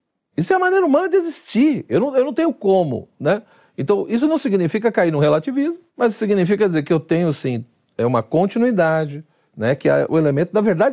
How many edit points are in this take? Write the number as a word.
two